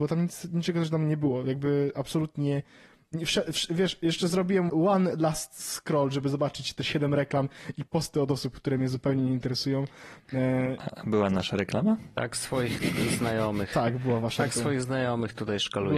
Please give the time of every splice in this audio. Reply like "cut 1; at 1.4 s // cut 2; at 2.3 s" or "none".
cut 1; at 4.7 s

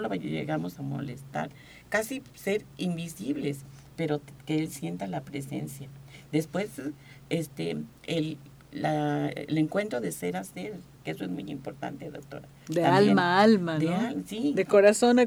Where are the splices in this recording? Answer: none

